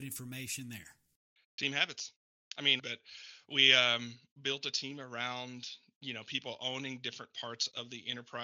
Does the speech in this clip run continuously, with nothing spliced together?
no; 1 cut; at 2.8 s

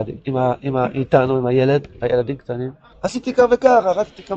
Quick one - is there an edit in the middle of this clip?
yes; 1 cut; at 2.9 s

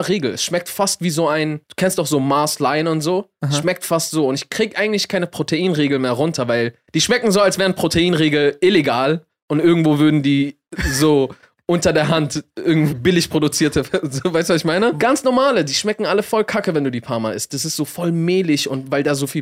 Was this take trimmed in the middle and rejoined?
yes; 2 cuts; at 12.9 s, 15.0 s

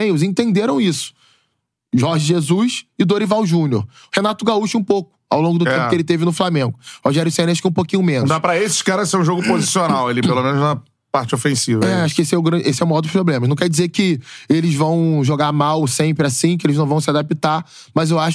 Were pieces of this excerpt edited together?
no; 0 cuts

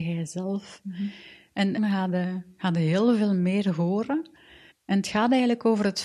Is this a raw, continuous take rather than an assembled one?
no; 2 cuts; at 1.8 s, 4.7 s

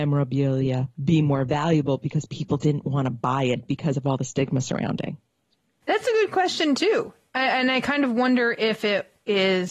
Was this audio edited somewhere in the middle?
no; 0 cuts

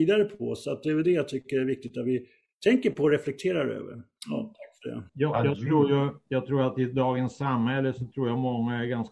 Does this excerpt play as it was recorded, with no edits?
no; 1 cut; at 5.1 s

